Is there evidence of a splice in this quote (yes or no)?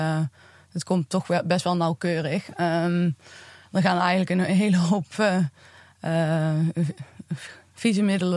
no